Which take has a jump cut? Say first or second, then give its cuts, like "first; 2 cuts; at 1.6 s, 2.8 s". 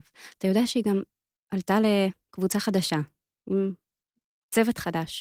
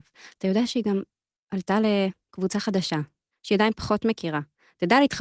second; 1 cut; at 3.3 s